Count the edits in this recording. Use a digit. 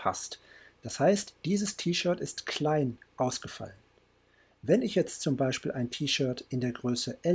0